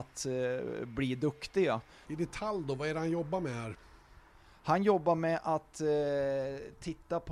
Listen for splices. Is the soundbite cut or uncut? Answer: cut